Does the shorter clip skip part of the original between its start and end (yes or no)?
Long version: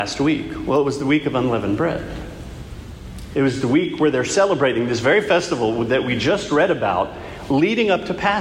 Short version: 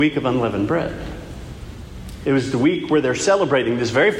no